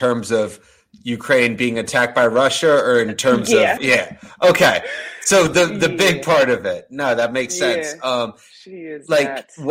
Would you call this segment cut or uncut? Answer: cut